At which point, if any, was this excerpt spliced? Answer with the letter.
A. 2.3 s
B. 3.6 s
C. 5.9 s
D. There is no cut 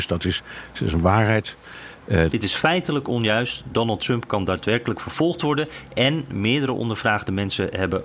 A